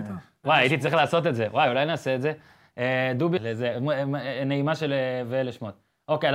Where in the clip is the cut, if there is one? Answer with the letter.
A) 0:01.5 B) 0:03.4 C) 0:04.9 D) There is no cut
B